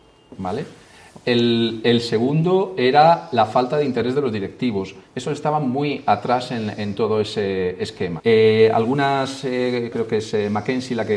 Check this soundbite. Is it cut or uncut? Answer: cut